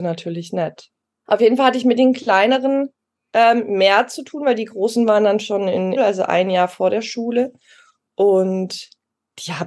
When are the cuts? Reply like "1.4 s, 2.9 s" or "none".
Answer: 1.3 s, 6.0 s